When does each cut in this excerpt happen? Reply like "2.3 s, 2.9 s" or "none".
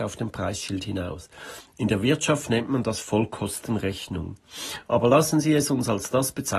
none